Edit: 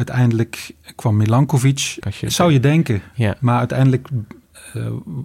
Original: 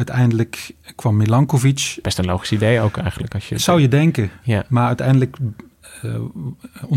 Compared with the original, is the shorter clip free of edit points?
no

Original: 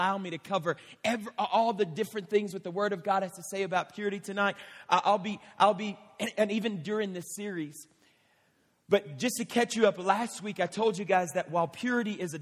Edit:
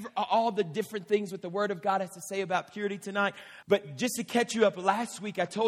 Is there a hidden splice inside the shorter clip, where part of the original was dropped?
yes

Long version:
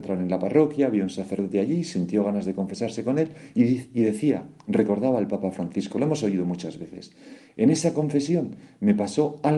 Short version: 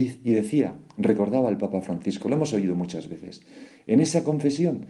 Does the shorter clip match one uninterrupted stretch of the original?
yes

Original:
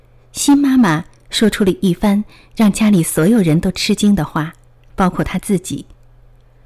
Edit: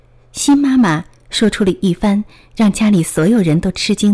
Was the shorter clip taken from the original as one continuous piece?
yes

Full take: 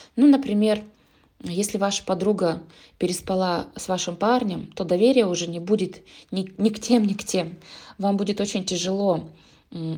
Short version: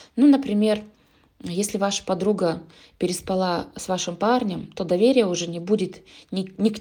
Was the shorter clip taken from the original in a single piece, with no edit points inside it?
yes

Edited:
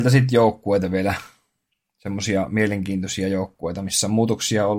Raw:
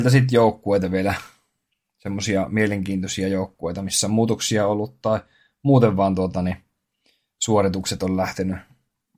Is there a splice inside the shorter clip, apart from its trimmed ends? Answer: no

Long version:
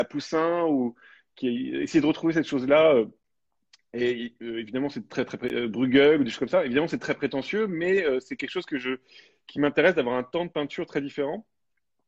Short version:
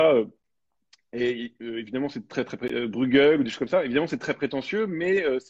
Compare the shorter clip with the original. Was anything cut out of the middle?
no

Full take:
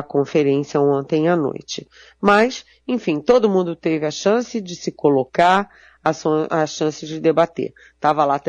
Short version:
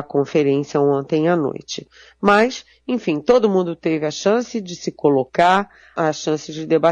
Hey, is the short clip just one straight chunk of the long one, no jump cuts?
no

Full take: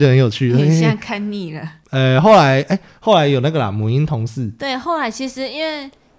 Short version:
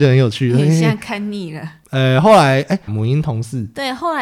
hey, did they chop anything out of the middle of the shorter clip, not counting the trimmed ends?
yes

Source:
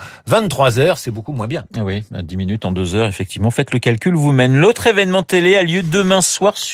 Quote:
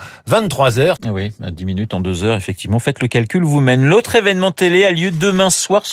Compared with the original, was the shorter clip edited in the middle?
yes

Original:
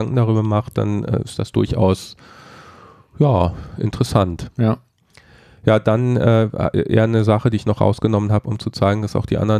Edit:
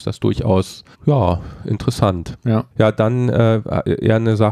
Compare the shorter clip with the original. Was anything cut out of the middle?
yes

